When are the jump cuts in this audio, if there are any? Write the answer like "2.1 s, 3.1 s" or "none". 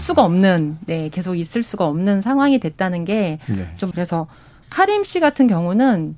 3.9 s